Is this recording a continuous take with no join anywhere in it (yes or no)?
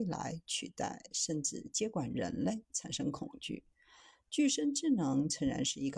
yes